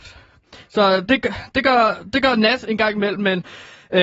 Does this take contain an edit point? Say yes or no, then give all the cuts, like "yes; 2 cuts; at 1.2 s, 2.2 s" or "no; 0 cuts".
yes; 1 cut; at 1.1 s